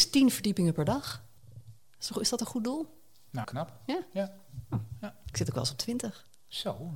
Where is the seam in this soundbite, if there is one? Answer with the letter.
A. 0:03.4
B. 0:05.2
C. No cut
A